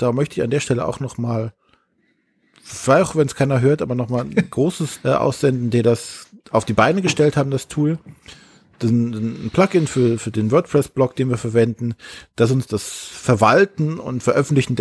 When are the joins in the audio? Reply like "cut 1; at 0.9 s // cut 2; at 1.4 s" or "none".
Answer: cut 1; at 5.0 s // cut 2; at 12.7 s